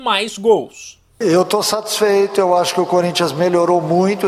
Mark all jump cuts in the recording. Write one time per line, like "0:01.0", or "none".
none